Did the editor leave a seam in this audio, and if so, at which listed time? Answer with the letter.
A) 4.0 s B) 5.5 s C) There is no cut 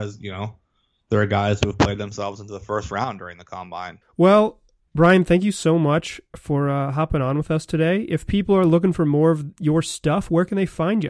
A